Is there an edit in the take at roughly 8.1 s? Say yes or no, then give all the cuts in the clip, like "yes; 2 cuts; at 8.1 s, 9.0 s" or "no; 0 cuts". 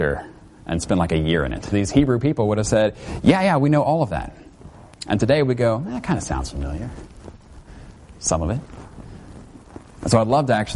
no; 1 cut; at 1.7 s